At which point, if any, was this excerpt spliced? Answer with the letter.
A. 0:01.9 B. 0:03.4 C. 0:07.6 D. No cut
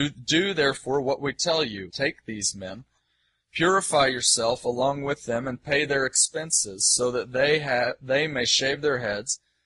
A